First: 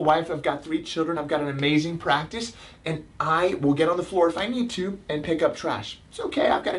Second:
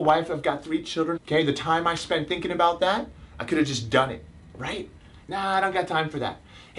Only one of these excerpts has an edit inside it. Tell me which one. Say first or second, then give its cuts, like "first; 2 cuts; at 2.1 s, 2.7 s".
second; 2 cuts; at 1.2 s, 5.2 s